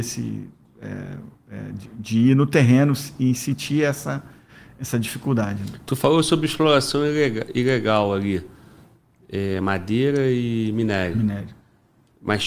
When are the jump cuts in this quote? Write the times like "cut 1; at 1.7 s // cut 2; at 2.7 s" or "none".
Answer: none